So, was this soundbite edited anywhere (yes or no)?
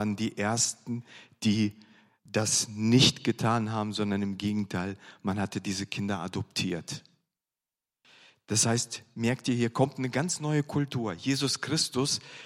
no